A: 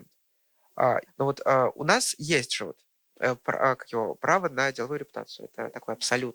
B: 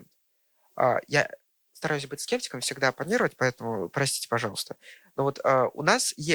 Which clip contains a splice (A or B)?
A